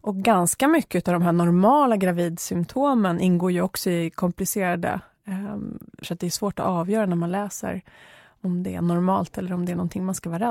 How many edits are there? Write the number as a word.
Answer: one